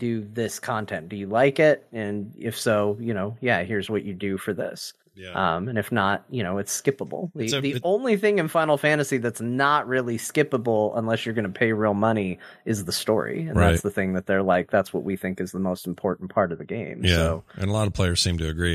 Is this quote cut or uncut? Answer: uncut